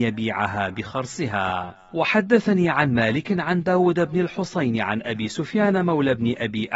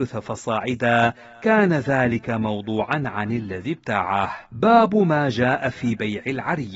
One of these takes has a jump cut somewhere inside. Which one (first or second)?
second